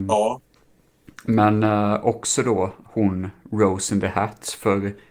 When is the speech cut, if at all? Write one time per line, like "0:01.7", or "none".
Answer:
none